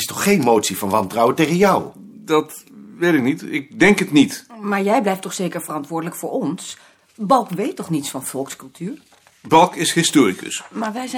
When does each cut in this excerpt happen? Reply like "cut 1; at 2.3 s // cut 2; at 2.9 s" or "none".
none